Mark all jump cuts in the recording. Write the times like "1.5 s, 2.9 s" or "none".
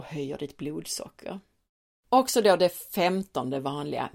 1.9 s